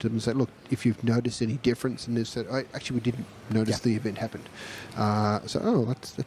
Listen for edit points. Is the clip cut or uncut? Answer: uncut